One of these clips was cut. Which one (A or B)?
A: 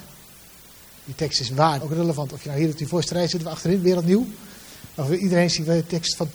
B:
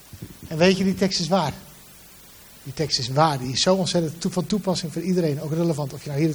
A